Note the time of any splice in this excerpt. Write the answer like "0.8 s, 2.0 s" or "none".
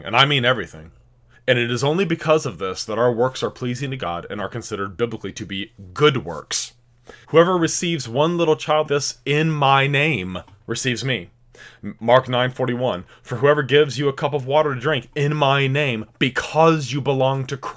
1.3 s, 7.2 s, 8.9 s